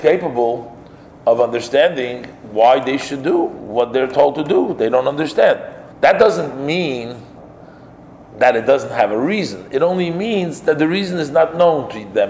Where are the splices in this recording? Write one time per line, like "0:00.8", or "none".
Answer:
0:05.9